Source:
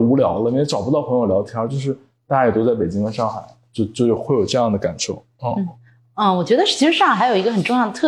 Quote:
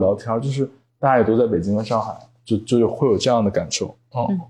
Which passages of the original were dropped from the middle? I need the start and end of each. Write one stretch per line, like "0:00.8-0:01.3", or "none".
none